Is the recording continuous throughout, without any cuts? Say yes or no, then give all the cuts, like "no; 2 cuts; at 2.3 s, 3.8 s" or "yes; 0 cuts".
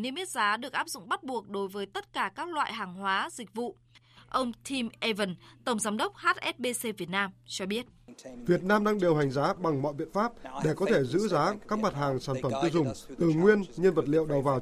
yes; 0 cuts